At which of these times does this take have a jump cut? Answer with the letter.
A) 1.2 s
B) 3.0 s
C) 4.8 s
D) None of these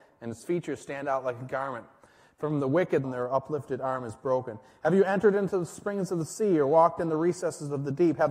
B